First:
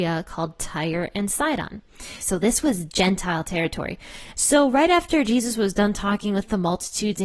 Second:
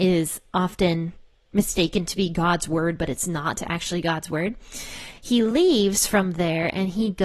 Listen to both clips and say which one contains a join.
first; 2 cuts; at 2.2 s, 4.3 s

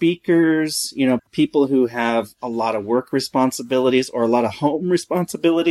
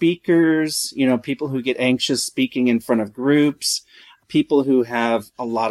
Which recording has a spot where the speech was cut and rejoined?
first; 1 cut; at 1.2 s

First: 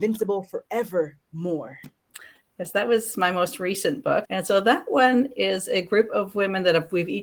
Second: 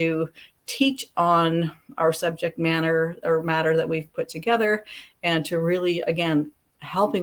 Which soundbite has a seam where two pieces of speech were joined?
first; 1 cut; at 4.2 s

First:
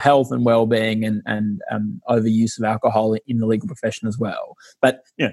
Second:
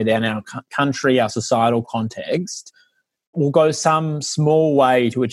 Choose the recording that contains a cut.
second; 1 cut; at 3.3 s

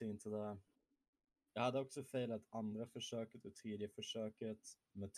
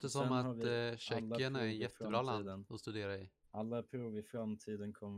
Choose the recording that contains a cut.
first; 1 cut; at 1.4 s

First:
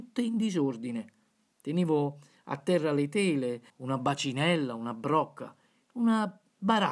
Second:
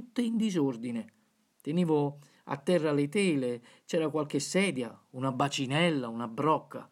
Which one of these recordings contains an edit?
first; 1 cut; at 3.7 s

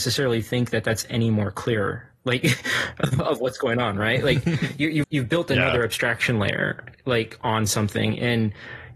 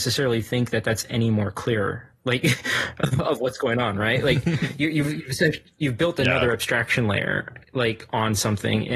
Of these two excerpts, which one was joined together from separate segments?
first; 1 cut; at 5.0 s

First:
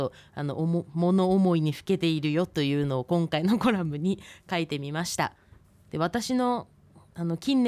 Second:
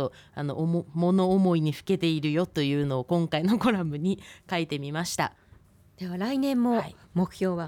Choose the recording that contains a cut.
first; 1 cut; at 5.8 s

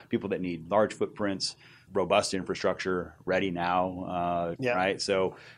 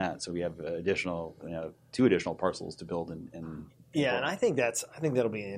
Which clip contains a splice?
first; 2 cuts; at 1.9 s, 4.6 s

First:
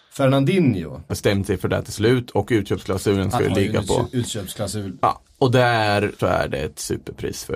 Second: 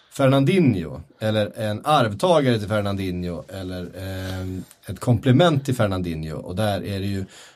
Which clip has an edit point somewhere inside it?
first; 3 cuts; at 1.1 s, 5.0 s, 6.2 s

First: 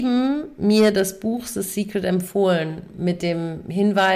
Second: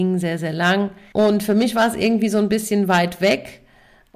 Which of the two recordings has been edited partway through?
second; 1 cut; at 1.1 s

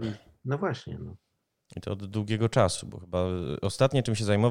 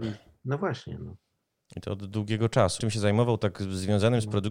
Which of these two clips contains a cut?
second; 1 cut; at 2.8 s

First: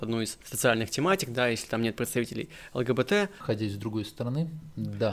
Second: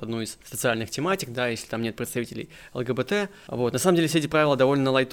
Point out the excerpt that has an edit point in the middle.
first; 1 cut; at 3.4 s

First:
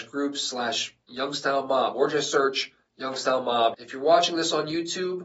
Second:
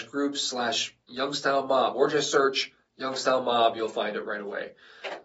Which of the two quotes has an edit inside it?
first; 1 cut; at 3.7 s

